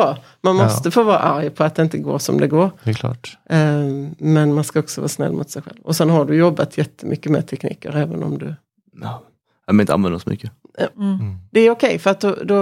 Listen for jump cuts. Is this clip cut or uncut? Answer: cut